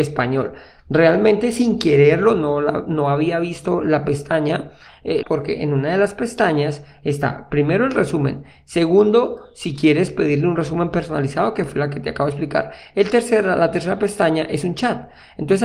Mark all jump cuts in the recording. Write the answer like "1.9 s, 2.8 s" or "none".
5.2 s